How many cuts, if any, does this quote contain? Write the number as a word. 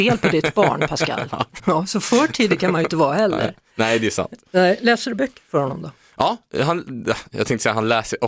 one